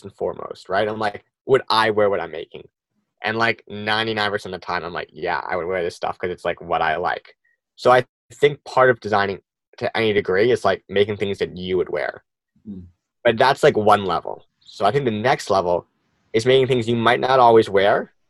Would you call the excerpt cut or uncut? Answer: uncut